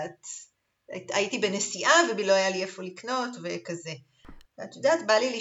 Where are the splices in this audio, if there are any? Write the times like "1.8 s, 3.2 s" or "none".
4.4 s